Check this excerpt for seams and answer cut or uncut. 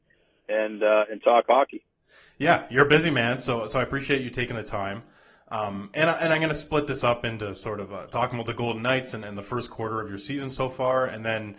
uncut